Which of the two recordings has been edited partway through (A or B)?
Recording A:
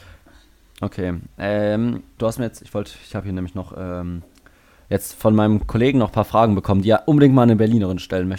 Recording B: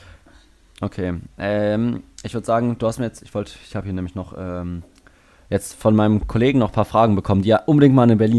A